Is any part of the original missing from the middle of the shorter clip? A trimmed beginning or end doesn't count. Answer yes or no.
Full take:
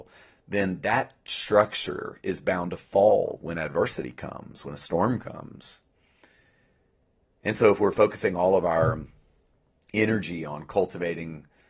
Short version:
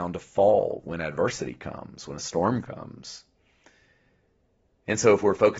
no